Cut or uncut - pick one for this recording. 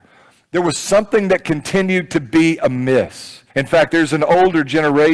cut